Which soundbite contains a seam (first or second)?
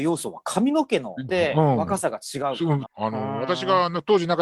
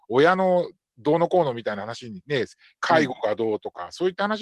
first